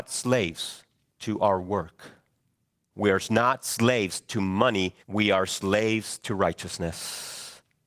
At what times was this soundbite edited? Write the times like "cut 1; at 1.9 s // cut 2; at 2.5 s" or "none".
cut 1; at 2.9 s // cut 2; at 5.0 s